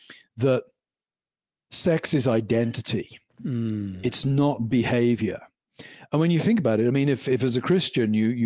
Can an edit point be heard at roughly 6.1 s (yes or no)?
no